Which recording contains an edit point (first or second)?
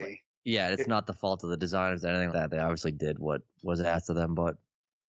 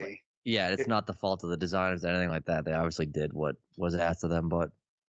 first